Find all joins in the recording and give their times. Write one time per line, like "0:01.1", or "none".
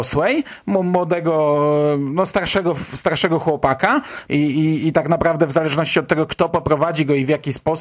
0:04.3